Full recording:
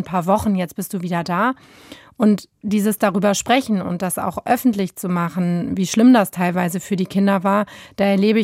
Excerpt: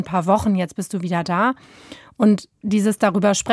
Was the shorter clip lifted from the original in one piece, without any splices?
yes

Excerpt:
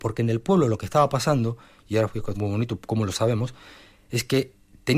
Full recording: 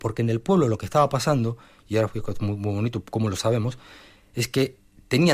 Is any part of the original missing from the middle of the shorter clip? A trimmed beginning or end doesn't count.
yes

